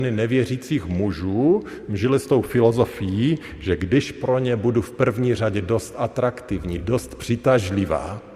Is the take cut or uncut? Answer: uncut